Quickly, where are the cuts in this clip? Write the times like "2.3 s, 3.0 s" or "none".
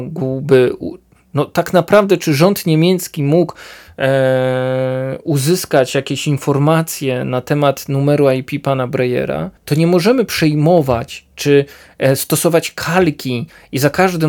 9.6 s